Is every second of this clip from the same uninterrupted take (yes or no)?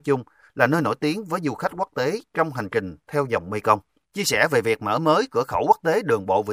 no